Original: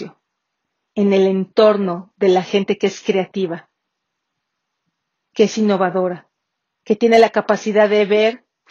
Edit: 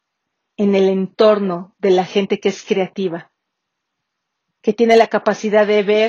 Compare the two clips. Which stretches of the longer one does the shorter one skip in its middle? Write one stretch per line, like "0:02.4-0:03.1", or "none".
0:04.9-0:06.7